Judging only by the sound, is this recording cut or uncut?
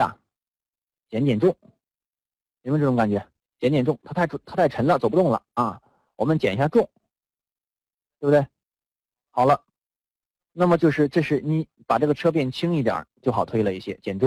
uncut